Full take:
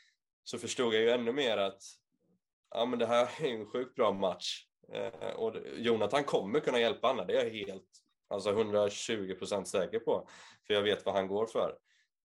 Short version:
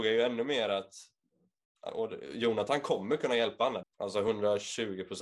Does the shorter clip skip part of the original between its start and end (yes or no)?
yes